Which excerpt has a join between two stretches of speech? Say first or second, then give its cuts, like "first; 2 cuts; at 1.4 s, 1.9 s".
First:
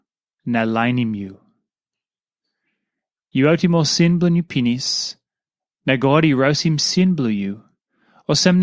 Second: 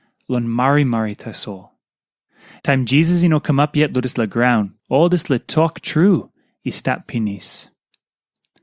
second; 2 cuts; at 2.6 s, 4.8 s